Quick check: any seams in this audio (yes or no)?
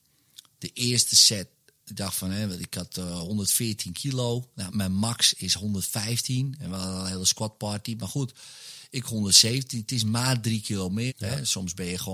yes